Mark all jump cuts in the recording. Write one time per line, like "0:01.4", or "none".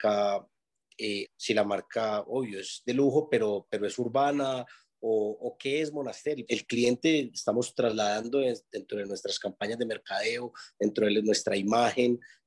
0:01.2
0:06.5